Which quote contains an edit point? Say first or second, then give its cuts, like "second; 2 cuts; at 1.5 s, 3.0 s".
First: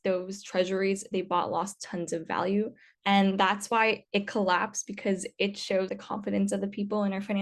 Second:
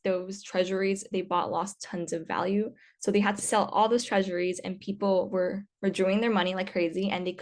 first; 2 cuts; at 2.9 s, 5.9 s